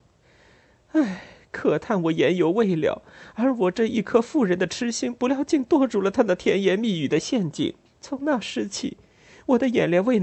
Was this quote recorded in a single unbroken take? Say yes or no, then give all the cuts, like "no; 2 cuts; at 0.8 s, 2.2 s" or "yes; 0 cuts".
no; 1 cut; at 7.9 s